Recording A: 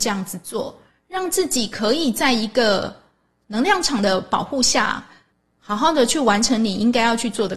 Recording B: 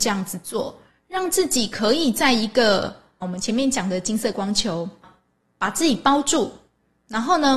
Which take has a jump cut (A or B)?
B